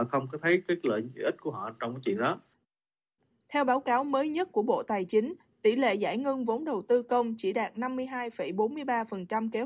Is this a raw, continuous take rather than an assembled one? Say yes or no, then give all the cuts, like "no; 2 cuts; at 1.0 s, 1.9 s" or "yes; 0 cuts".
no; 1 cut; at 5.5 s